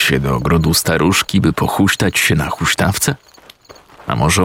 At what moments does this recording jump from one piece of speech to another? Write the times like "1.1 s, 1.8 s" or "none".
none